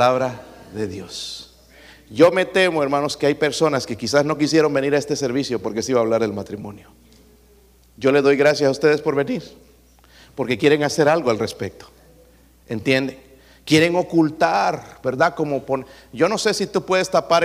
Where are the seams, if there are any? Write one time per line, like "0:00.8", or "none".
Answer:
none

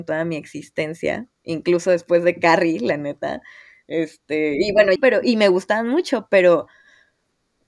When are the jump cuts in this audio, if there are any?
0:05.0

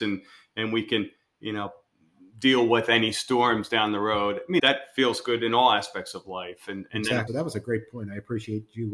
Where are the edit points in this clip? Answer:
0:04.6
0:07.3

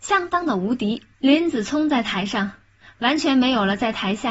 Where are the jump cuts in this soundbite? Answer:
0:01.1

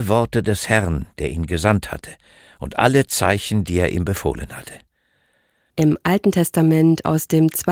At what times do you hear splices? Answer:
0:05.7

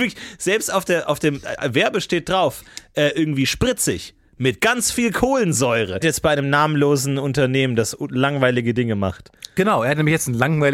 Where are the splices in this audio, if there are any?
0:06.0

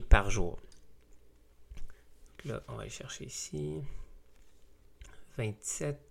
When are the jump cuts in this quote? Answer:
0:02.3

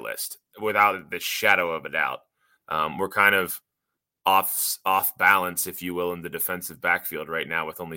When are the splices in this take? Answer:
0:02.6

